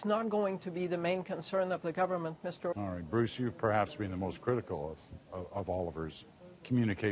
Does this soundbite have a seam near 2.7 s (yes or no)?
yes